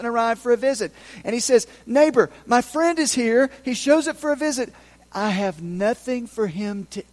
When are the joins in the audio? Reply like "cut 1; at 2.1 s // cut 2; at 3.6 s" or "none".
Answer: none